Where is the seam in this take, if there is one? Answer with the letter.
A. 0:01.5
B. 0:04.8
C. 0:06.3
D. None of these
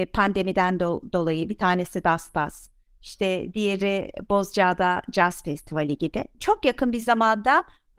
C